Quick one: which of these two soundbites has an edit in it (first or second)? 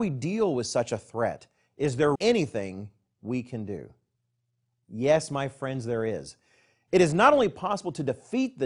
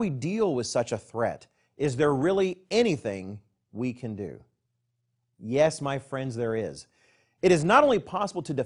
first